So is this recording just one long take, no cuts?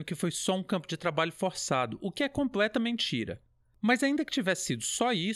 yes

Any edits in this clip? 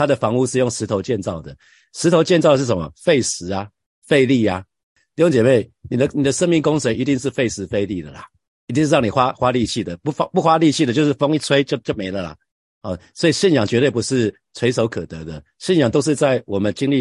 no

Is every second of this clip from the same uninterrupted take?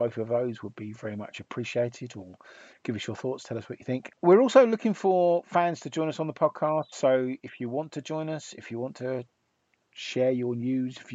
yes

